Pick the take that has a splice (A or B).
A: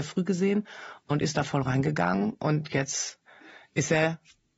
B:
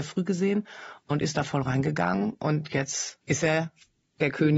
B